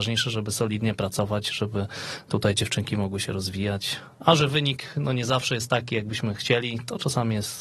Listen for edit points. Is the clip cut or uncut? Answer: uncut